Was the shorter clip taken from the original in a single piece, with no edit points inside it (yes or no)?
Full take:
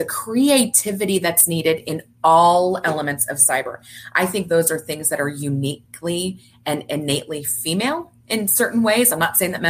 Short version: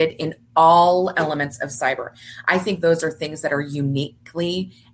yes